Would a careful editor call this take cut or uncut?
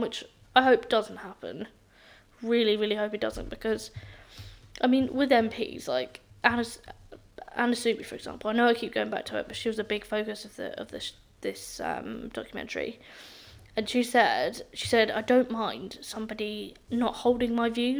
uncut